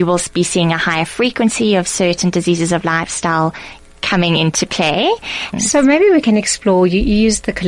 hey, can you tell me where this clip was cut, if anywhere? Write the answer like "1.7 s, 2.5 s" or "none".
5.5 s